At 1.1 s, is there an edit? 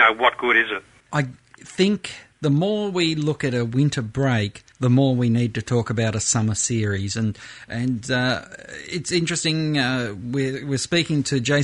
yes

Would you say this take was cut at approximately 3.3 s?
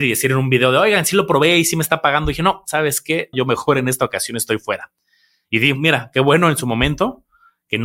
yes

